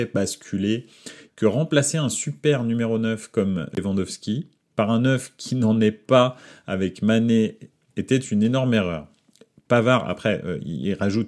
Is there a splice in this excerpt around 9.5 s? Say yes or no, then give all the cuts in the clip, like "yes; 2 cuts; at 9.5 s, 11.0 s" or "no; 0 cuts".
no; 1 cut; at 1.3 s